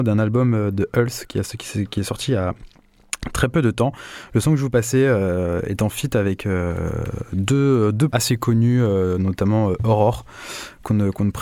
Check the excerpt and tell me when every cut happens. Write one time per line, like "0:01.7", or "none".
0:08.1